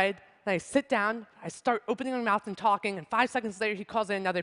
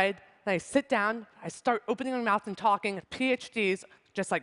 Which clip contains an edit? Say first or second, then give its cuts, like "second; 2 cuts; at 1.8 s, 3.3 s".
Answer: second; 1 cut; at 3.0 s